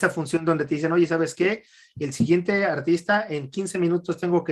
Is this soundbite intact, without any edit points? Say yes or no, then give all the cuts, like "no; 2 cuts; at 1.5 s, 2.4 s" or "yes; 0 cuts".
yes; 0 cuts